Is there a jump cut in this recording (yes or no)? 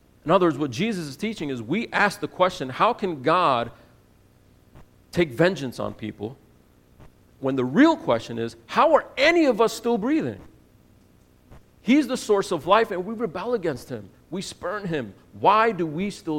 no